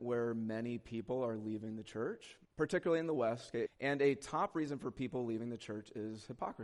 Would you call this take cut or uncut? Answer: cut